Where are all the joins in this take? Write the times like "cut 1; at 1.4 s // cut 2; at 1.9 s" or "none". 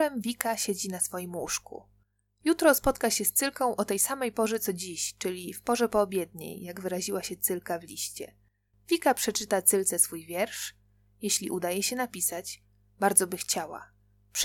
none